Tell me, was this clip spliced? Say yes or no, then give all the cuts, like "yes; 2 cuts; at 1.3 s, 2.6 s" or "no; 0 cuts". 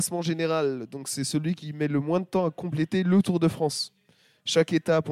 no; 0 cuts